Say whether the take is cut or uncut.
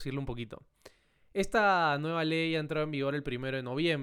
uncut